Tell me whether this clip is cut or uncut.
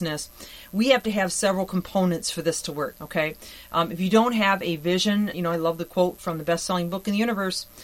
cut